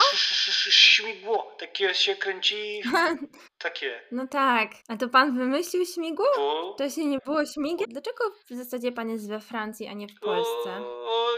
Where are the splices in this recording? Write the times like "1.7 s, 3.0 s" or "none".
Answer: 3.5 s, 4.8 s, 7.8 s